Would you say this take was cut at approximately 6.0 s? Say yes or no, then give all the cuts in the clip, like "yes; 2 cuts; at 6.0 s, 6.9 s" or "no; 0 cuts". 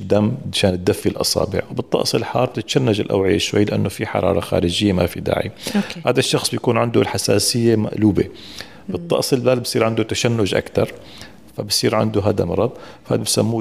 no; 0 cuts